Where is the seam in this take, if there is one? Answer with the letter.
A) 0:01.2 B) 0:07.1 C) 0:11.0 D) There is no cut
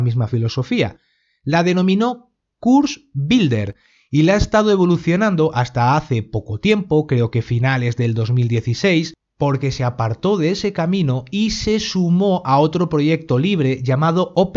D